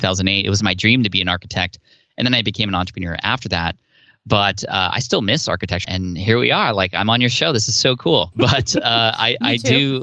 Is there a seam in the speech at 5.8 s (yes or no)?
yes